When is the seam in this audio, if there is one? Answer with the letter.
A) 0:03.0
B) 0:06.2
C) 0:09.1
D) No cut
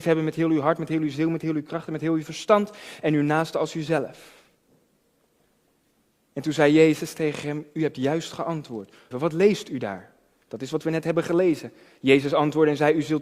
C